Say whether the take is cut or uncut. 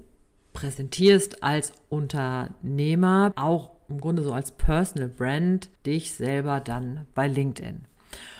cut